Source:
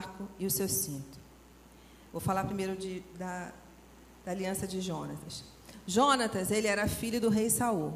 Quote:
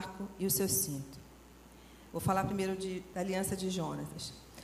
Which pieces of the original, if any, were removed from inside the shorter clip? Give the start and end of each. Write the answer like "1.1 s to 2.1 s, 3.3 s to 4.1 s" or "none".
3.1 s to 4.2 s

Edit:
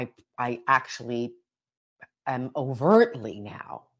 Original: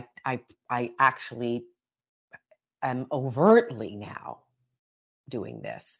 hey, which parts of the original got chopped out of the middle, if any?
2.5 s to 2.7 s

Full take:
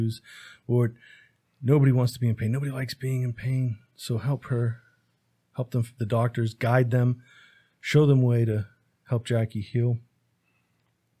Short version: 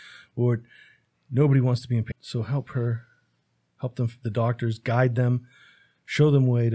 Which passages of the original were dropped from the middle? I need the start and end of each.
2.4 s to 3.9 s

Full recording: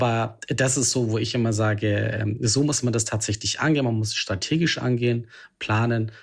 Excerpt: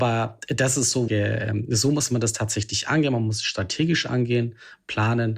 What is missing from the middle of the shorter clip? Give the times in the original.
1.1 s to 1.8 s

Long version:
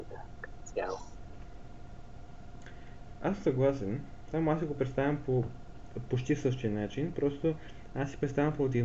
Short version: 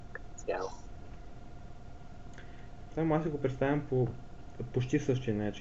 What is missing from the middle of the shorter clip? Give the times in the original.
3.2 s to 4.3 s

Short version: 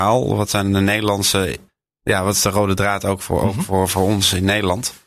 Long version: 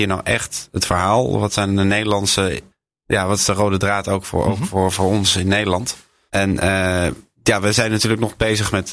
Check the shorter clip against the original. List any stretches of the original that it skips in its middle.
none

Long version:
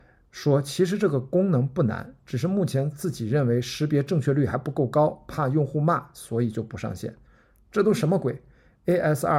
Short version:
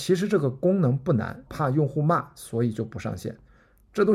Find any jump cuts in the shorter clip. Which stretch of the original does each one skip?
2.2 s to 5.2 s

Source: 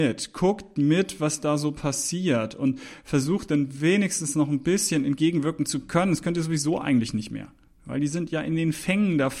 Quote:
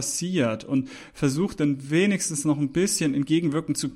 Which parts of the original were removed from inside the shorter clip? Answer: none

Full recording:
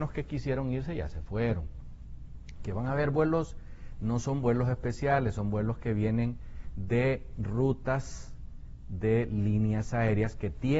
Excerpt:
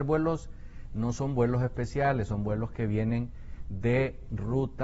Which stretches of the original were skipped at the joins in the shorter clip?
none

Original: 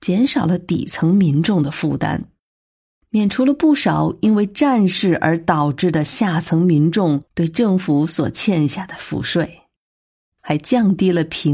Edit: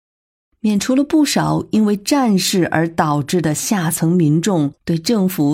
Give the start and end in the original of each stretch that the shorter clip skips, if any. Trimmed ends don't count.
none

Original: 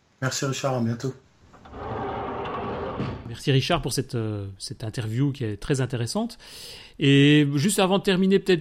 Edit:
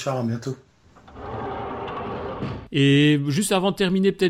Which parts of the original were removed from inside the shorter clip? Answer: 3.2 s to 6.9 s

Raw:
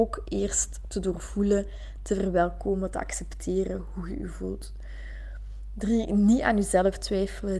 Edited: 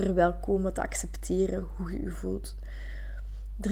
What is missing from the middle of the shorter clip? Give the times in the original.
none

